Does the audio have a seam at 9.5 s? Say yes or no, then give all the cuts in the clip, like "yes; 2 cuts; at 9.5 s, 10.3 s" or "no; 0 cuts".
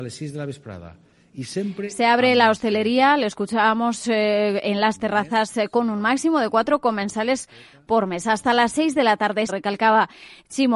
yes; 1 cut; at 9.5 s